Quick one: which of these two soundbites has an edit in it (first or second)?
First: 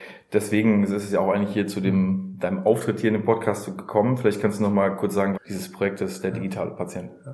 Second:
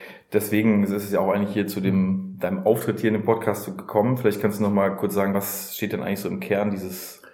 first